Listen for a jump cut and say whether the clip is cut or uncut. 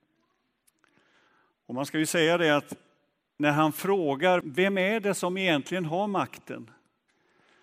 cut